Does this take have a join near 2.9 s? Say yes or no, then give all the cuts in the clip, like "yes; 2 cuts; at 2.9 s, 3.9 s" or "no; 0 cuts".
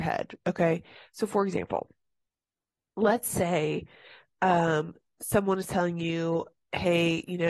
no; 0 cuts